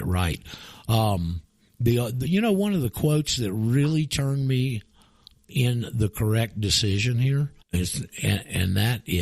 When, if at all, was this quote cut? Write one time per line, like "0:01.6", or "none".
0:07.6